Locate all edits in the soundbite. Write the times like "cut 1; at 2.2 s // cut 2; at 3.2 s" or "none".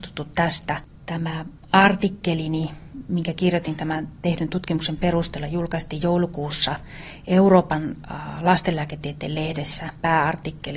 none